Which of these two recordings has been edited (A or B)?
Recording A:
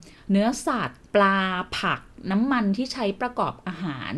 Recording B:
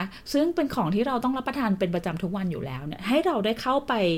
A